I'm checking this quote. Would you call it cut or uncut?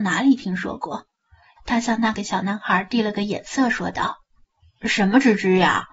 cut